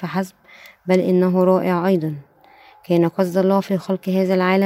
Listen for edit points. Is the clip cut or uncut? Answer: uncut